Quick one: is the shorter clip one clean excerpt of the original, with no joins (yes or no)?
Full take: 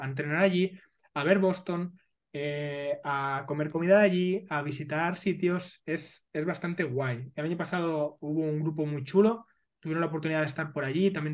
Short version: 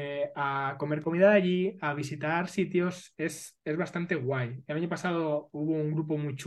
yes